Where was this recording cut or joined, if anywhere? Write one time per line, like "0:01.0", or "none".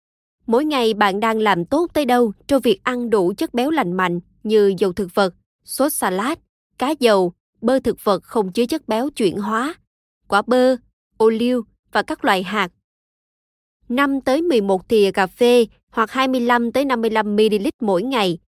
none